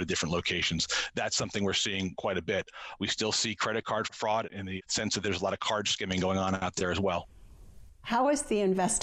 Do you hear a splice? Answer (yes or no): yes